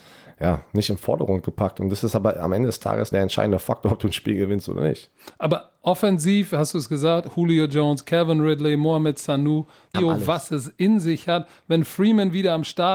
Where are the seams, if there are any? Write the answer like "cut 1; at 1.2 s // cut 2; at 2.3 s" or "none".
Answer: cut 1; at 3.1 s // cut 2; at 9.9 s